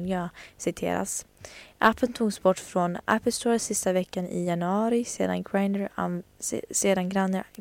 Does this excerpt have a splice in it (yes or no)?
no